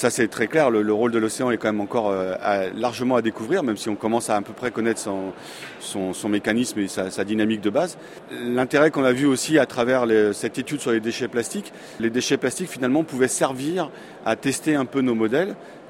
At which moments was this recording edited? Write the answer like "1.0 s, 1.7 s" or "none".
12.0 s